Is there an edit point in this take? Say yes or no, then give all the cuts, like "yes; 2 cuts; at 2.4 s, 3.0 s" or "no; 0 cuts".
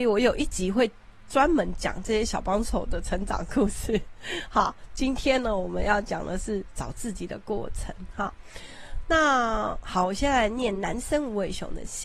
no; 0 cuts